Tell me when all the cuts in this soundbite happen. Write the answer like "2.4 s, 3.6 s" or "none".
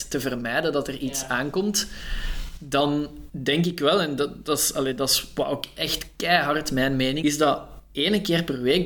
7.2 s

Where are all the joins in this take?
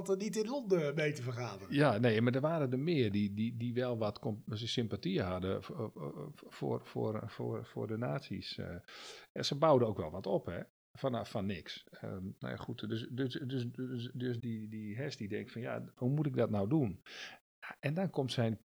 14.4 s

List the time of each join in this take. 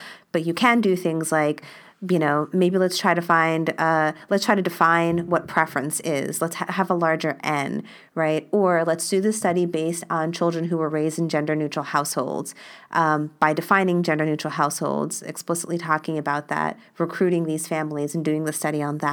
none

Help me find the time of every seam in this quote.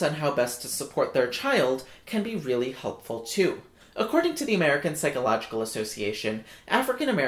3.8 s

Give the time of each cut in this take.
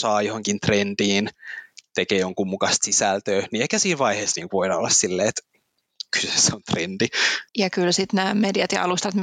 7.5 s

